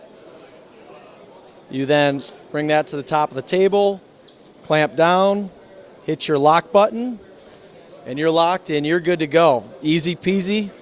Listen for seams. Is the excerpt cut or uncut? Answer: uncut